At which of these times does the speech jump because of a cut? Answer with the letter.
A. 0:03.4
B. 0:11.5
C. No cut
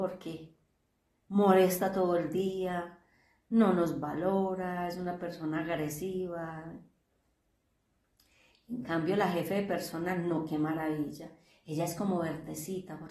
C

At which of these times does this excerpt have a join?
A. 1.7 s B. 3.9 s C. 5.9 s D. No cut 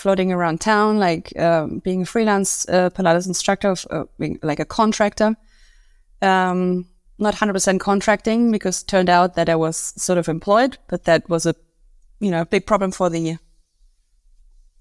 D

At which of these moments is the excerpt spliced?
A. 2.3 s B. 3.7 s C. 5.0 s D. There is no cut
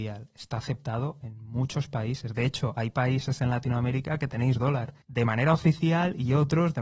C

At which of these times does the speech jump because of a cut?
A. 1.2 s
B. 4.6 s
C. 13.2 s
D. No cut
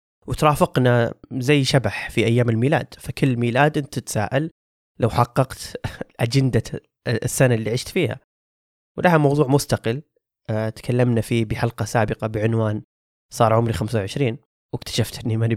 A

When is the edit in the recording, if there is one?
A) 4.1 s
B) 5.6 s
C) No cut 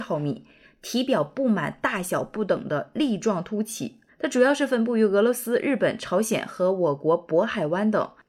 A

